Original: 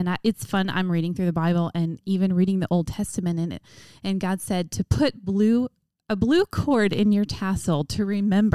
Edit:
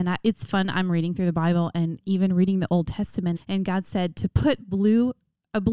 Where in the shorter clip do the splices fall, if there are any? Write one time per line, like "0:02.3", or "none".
0:03.4